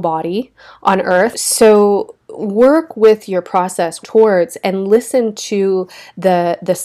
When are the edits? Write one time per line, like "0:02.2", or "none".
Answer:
0:01.3
0:04.0